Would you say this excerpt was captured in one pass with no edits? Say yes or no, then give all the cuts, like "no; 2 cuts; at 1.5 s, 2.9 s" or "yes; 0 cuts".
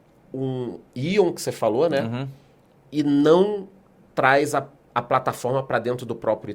yes; 0 cuts